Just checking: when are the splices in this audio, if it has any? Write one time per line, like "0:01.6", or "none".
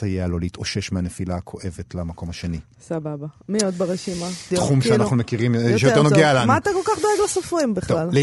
0:04.5